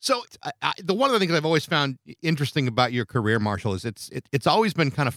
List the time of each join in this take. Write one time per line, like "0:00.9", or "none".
none